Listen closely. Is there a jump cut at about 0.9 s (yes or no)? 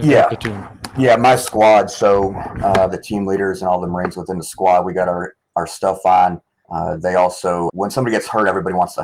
no